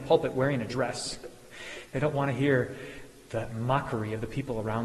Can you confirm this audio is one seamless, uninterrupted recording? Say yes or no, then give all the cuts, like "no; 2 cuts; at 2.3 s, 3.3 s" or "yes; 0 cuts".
yes; 0 cuts